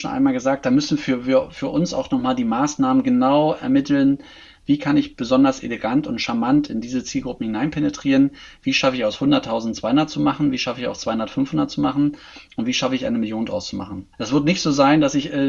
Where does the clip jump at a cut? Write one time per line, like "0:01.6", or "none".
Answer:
0:14.1